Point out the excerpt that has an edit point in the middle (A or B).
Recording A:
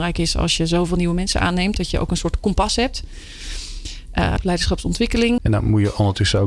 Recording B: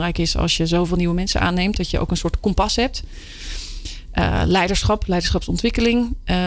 A